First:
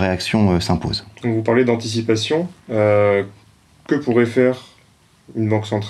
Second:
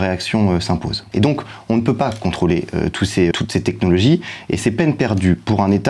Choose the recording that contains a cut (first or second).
second